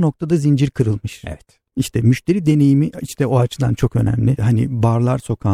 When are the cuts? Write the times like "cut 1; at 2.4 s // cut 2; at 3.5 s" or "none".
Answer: cut 1; at 4.4 s